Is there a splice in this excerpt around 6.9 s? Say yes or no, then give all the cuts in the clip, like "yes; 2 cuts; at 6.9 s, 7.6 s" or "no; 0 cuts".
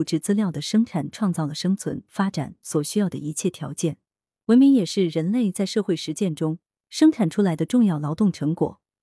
no; 1 cut; at 4.4 s